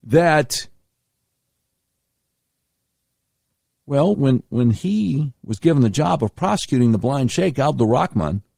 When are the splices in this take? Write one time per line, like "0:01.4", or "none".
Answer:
0:04.1